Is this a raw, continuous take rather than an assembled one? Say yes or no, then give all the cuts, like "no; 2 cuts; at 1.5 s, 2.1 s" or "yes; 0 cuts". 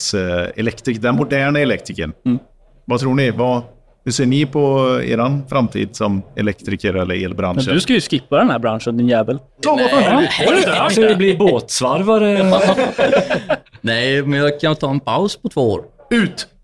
no; 1 cut; at 9.6 s